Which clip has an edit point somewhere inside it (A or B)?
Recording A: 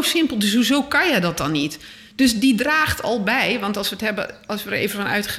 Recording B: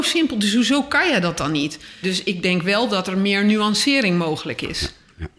B